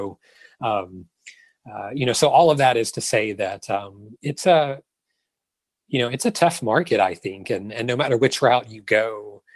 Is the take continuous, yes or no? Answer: yes